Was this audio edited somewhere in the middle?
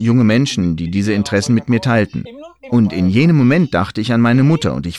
yes; 1 cut; at 2.7 s

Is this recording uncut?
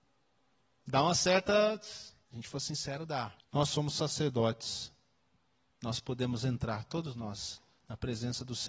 no; 2 cuts; at 2.2 s, 3.4 s

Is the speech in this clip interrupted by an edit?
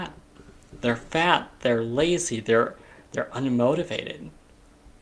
no; 0 cuts

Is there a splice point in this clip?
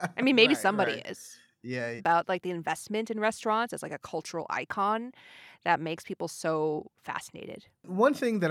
yes; 1 cut; at 2.0 s

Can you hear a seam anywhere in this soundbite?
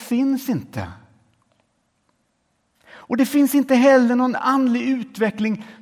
no; 0 cuts

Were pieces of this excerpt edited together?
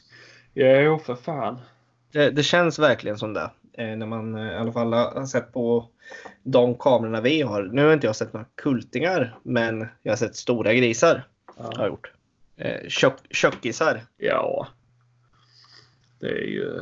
yes; 1 cut; at 14.1 s

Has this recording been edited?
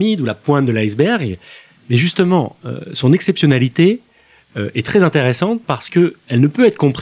no; 0 cuts

